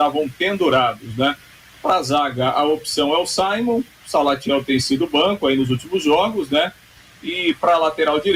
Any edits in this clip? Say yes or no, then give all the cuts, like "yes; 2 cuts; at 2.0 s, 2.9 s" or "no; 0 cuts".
no; 0 cuts